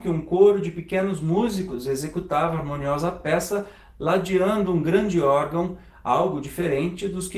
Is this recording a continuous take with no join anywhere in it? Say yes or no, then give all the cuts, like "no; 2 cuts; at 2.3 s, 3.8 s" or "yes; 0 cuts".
yes; 0 cuts